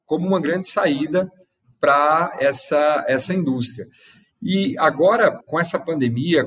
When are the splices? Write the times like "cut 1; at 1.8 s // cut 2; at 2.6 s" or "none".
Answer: cut 1; at 5.4 s